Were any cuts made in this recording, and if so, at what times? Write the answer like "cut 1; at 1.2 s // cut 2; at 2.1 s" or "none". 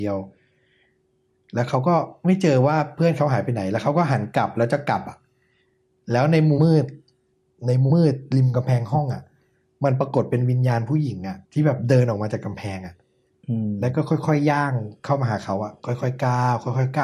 cut 1; at 6.6 s // cut 2; at 7.9 s // cut 3; at 11.4 s